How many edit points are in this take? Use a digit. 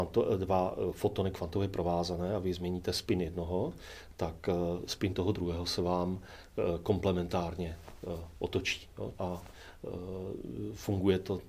1